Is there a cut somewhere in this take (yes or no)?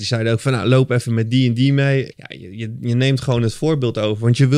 yes